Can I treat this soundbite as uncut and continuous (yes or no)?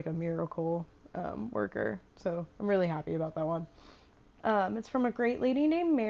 no